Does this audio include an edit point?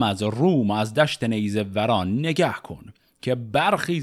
no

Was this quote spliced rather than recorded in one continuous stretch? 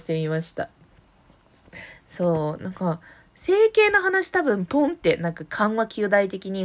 no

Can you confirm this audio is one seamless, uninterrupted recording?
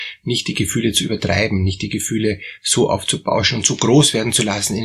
yes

